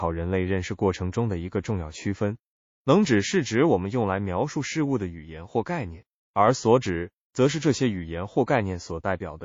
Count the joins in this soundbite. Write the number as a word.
zero